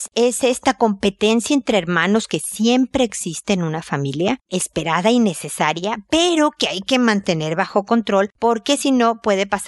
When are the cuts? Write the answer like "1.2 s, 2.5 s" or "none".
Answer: 4.5 s